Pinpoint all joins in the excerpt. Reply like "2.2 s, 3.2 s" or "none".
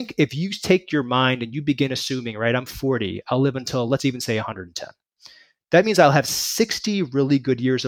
none